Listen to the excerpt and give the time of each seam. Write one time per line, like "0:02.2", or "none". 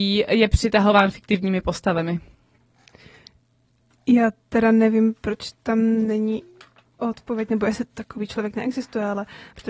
none